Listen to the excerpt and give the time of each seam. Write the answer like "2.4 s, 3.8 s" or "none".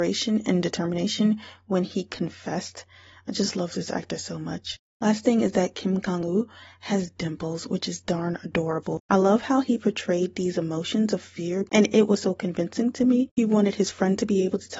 9.1 s, 13.3 s

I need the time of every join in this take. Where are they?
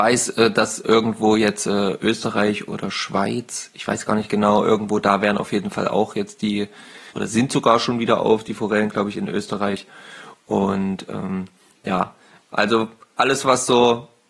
7.1 s

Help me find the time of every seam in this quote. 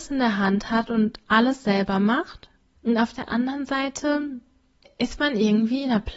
2.7 s

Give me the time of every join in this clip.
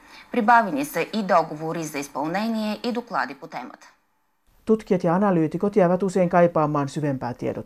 none

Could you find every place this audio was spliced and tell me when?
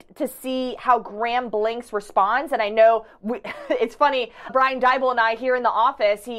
4.5 s

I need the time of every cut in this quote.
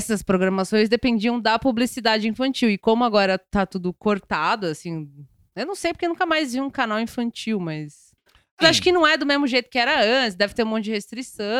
8.6 s

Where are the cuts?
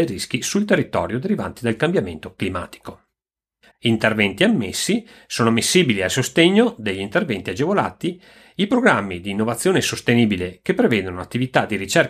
3.7 s

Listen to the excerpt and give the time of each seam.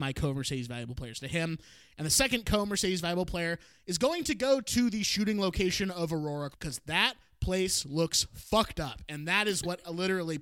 6.5 s

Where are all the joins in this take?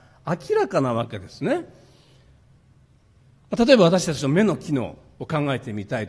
none

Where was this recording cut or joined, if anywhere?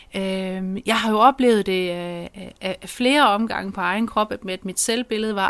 none

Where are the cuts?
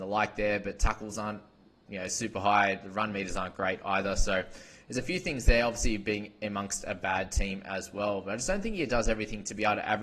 none

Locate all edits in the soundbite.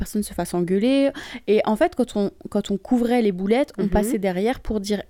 none

